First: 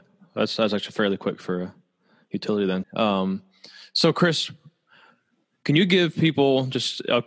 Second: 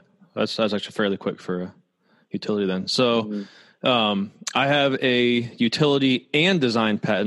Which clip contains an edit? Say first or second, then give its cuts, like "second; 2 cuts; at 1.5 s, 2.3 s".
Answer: first; 1 cut; at 2.8 s